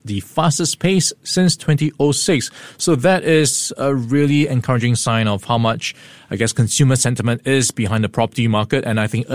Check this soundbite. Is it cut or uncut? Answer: uncut